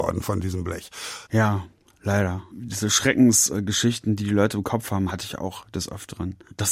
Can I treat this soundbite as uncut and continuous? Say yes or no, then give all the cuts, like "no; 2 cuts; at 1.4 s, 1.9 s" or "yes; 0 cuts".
no; 2 cuts; at 1.3 s, 5.1 s